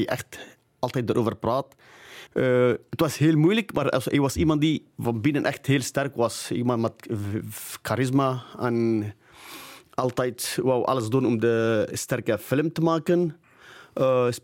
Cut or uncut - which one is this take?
cut